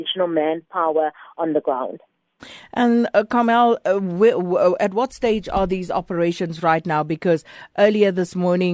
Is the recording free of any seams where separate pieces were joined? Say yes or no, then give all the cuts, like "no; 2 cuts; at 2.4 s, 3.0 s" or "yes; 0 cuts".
yes; 0 cuts